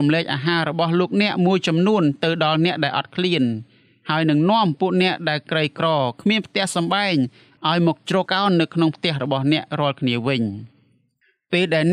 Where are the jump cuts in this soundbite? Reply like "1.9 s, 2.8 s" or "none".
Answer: 8.3 s